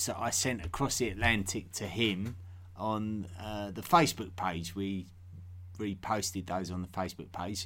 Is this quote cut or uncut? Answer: uncut